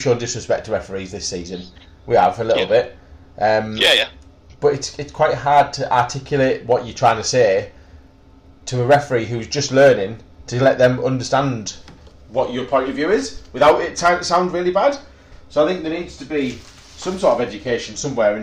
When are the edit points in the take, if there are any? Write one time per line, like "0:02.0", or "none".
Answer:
none